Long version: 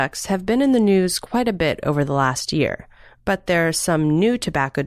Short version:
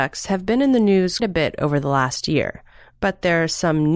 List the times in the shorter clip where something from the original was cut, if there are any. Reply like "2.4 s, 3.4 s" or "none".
1.2 s